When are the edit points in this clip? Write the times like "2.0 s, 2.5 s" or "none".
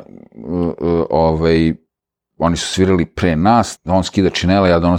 3.8 s